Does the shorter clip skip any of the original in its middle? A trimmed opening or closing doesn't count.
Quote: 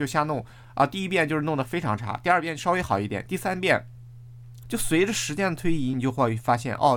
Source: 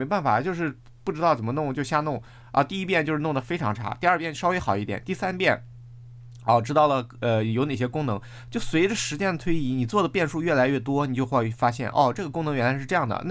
yes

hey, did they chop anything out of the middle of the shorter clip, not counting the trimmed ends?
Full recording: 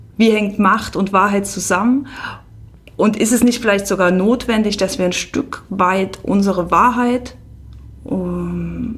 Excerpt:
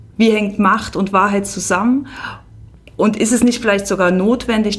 no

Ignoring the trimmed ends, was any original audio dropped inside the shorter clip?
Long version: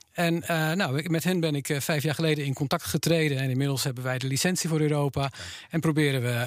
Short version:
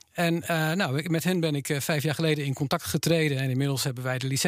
no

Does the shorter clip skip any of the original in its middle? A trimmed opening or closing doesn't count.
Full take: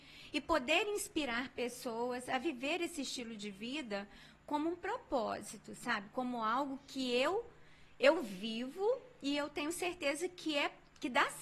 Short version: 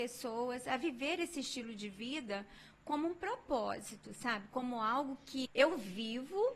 yes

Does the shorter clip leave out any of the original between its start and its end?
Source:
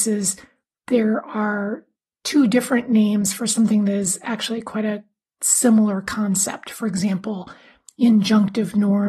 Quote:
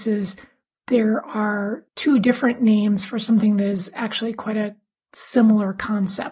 yes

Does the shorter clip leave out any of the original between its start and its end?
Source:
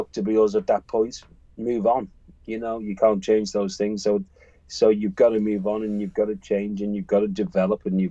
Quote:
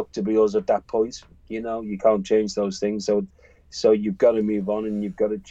yes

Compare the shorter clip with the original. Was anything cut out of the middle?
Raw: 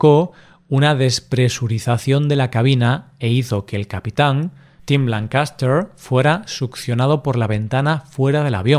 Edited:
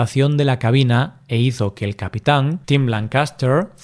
yes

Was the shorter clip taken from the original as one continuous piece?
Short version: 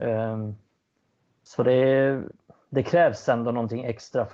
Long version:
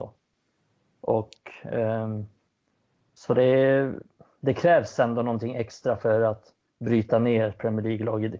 yes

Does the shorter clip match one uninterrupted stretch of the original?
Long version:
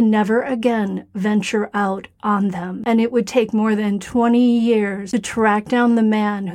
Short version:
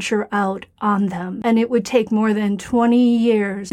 yes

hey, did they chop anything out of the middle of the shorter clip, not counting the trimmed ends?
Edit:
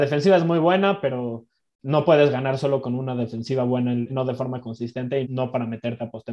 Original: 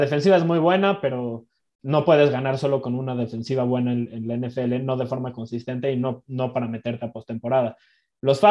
yes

